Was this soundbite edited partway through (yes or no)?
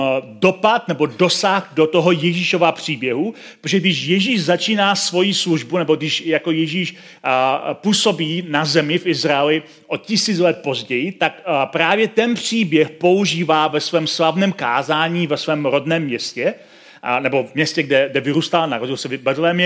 no